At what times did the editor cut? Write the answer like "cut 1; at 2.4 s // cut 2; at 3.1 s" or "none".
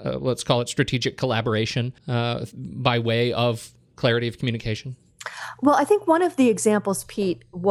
cut 1; at 2.0 s